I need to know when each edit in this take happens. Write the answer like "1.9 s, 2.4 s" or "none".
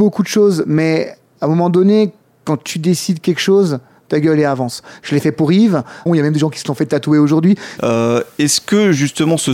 6.1 s, 7.8 s